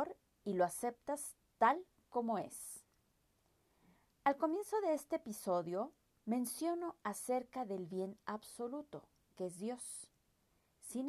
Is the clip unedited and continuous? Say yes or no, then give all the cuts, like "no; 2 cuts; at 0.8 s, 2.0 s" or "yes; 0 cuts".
no; 1 cut; at 6.1 s